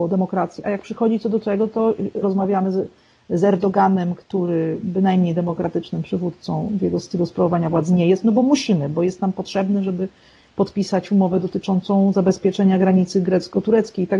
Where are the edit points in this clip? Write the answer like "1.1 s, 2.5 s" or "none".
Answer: 2.2 s